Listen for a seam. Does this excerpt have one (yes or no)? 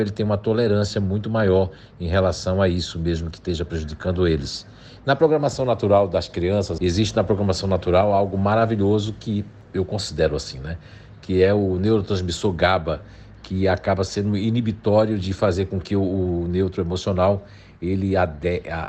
yes